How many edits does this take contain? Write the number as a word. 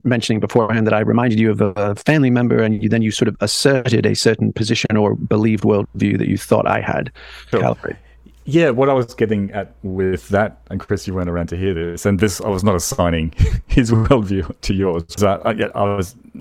two